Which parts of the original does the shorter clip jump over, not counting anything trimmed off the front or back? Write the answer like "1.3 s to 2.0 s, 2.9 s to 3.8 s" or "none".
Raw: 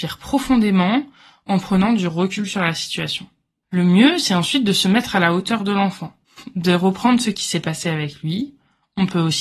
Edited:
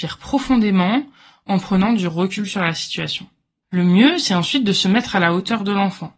none